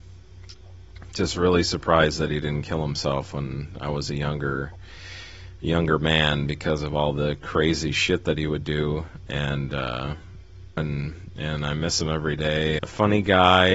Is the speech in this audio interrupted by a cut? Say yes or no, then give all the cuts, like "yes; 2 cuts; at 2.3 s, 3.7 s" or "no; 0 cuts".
yes; 3 cuts; at 9.3 s, 10.8 s, 12.8 s